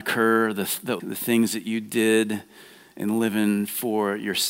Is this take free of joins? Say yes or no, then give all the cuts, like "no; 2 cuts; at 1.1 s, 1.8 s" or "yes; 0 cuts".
no; 1 cut; at 1.0 s